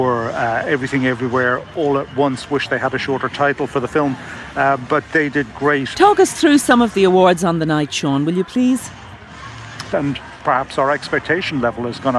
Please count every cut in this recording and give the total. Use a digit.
2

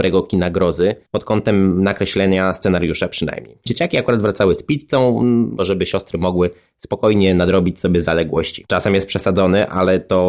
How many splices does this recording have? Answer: 3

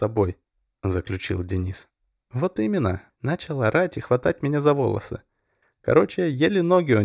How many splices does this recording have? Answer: 2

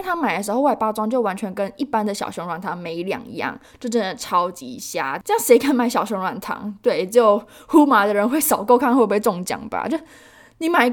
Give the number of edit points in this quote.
0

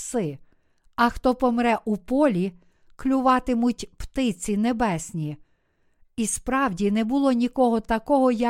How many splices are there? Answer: 0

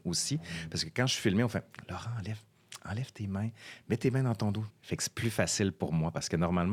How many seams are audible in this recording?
1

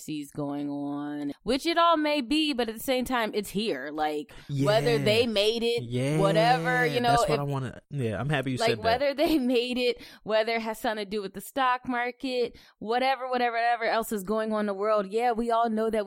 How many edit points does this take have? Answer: 1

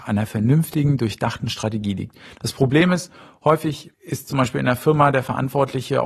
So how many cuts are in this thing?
1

